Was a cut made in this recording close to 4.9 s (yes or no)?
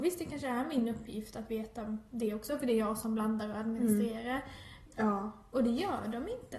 yes